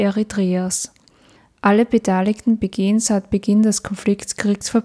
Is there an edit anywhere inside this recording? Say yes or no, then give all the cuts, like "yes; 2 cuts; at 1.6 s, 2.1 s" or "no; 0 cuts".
no; 0 cuts